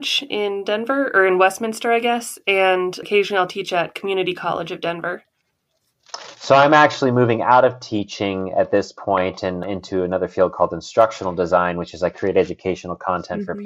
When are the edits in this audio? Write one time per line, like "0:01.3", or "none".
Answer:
none